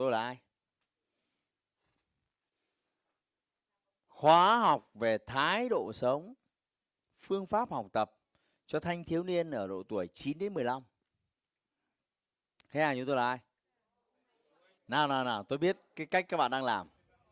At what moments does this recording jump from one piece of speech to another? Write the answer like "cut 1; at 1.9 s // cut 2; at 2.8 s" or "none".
cut 1; at 14.8 s